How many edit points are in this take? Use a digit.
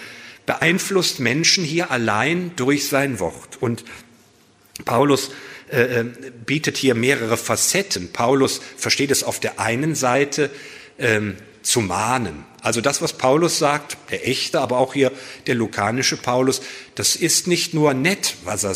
0